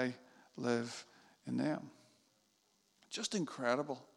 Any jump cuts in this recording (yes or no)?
no